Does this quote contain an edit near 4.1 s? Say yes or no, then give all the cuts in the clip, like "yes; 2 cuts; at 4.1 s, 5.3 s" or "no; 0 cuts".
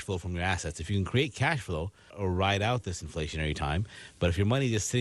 no; 1 cut; at 2.1 s